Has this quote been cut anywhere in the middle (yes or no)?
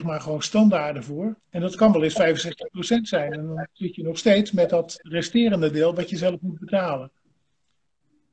yes